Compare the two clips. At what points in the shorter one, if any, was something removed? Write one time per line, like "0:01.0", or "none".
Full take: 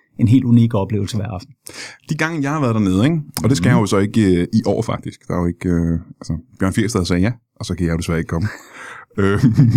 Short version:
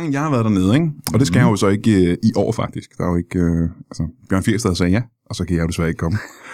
none